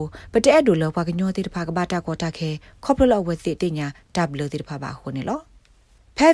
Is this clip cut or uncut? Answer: cut